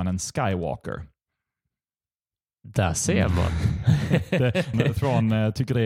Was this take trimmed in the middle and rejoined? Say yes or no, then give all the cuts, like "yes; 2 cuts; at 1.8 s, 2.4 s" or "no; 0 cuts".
yes; 1 cut; at 4.7 s